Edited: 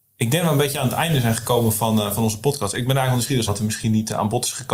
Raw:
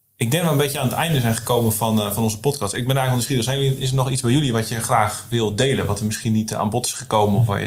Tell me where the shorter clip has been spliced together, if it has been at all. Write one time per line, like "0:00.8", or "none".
0:03.5

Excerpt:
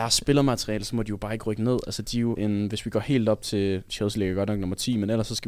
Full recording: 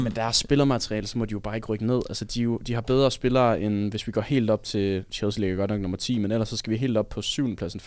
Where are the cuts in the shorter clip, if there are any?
0:02.4

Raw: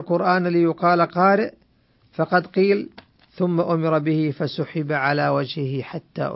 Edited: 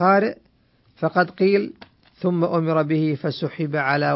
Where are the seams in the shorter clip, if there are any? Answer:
none

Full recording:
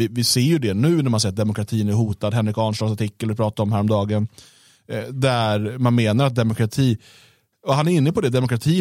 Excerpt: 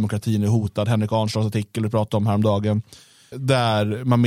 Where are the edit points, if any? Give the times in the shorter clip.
0:03.3

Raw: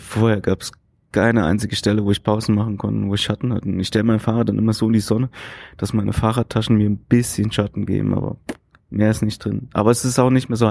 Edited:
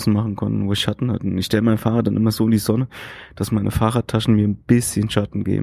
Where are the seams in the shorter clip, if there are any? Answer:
none

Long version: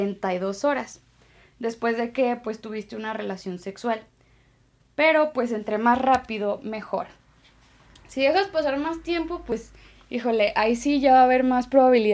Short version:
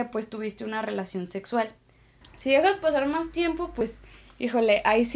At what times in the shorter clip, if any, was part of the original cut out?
0:02.2

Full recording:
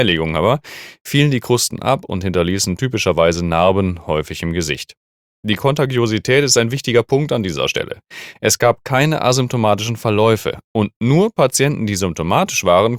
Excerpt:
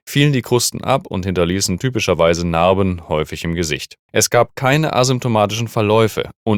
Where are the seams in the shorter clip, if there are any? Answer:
0:04.1

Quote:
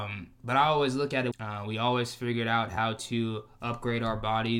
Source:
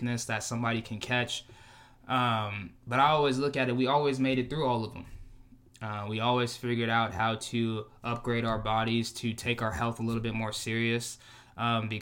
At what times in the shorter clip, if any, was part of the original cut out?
0:01.3

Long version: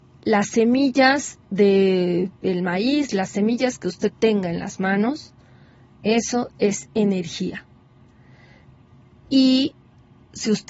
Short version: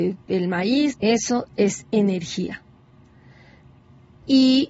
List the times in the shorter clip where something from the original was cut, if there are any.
0:00.9

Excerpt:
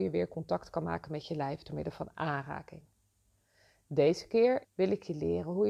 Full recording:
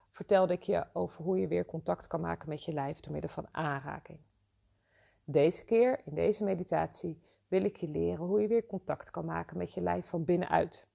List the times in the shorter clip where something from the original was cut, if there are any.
0:04.6

